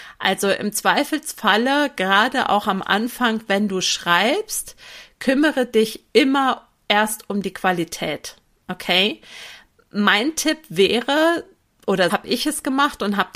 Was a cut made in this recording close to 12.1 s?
yes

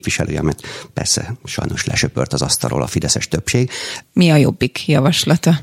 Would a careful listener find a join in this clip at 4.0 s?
yes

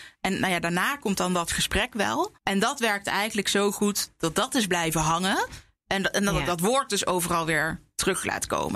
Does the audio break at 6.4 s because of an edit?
no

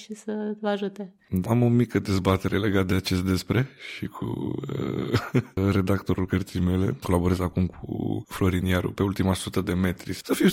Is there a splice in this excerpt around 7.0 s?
no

